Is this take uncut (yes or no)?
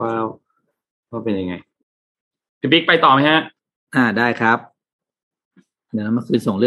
yes